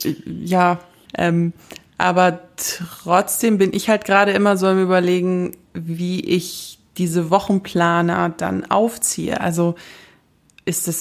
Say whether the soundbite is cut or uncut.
cut